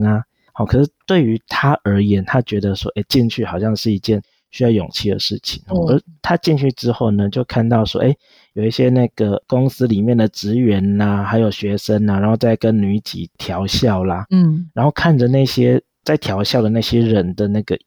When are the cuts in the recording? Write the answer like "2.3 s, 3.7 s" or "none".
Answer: none